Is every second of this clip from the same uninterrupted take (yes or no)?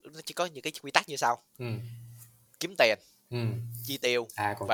yes